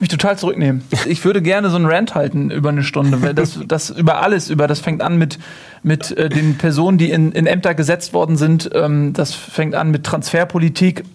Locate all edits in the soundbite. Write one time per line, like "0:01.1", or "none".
0:01.0